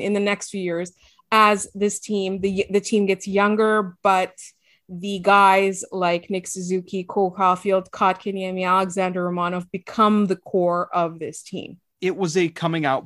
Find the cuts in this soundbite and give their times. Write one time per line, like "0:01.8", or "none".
none